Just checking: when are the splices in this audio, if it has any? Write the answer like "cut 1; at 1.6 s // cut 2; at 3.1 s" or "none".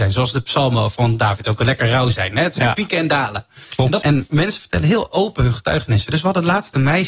cut 1; at 4.0 s